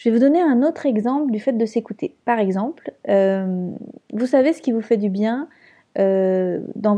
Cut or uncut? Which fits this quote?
uncut